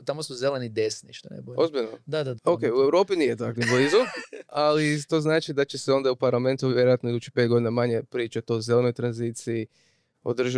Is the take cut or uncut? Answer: cut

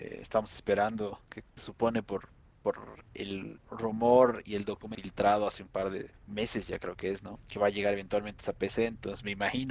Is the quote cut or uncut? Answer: cut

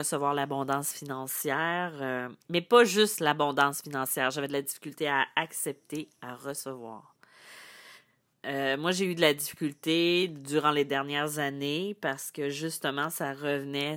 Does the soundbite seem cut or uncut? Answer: cut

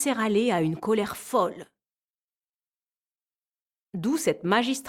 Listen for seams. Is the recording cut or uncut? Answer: uncut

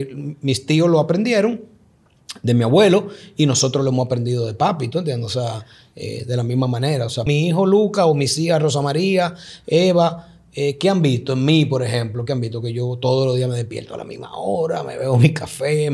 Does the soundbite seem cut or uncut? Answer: cut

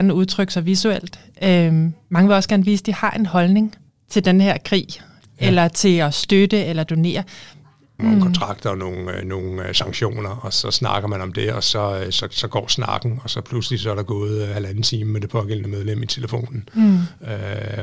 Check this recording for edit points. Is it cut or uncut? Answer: cut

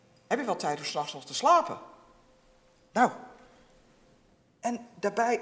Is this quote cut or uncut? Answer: uncut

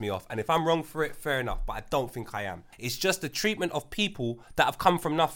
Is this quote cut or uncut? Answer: cut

